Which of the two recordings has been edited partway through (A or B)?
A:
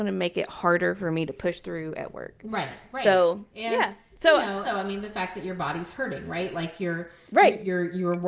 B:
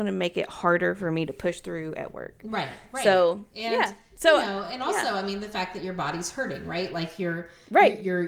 A